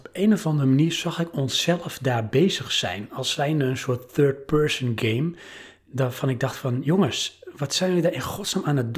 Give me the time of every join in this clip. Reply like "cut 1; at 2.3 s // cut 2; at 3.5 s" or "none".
none